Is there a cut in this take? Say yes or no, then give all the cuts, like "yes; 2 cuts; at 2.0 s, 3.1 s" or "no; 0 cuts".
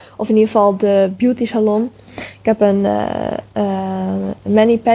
no; 0 cuts